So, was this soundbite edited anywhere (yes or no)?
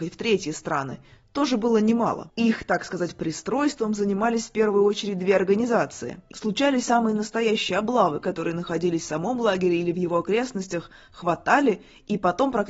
yes